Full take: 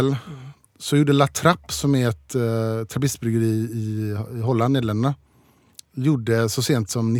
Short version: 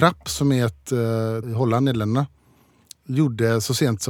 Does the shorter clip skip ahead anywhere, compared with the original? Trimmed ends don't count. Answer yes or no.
yes